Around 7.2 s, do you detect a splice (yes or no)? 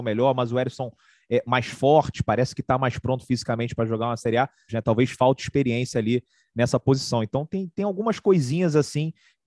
no